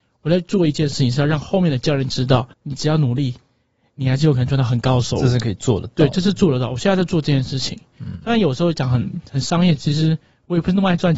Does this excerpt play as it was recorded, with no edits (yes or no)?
no